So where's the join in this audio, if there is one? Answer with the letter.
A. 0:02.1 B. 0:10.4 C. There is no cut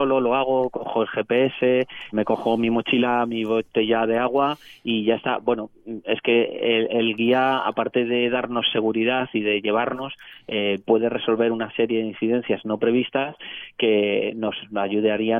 A